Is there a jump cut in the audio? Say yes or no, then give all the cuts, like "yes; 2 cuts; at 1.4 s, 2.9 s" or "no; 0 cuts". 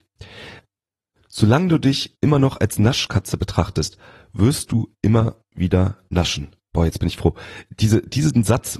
no; 0 cuts